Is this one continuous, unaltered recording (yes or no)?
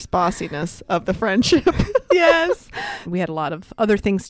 no